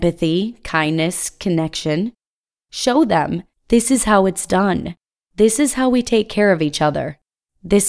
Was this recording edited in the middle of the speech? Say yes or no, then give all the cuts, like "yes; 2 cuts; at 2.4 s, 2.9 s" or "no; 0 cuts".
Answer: no; 0 cuts